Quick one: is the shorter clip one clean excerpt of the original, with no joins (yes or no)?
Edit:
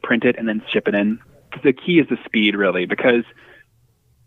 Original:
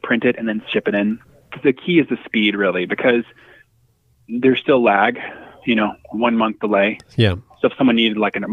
yes